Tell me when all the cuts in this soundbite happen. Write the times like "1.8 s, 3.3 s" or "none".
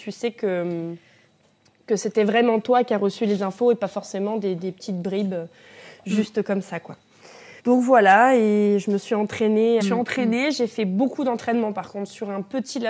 7.6 s, 9.8 s